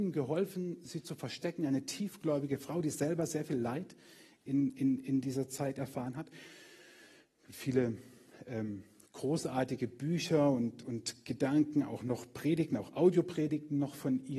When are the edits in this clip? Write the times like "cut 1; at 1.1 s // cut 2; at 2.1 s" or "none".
none